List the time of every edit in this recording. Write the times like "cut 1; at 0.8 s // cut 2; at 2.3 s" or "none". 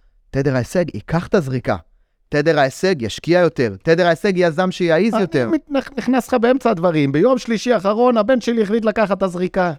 none